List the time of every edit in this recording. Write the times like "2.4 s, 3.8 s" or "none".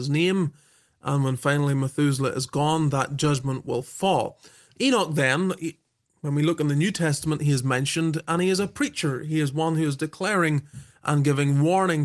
none